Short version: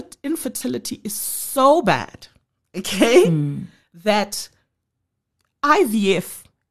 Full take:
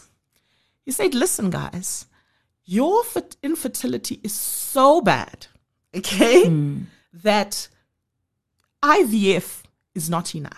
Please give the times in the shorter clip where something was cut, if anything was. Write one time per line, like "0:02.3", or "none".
none